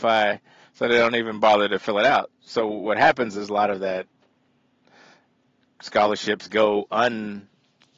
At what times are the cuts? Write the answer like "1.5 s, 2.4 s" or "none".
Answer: none